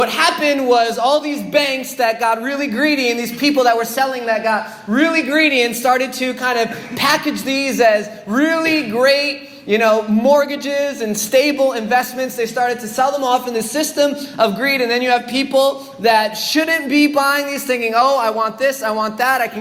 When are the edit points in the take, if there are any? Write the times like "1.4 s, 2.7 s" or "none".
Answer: none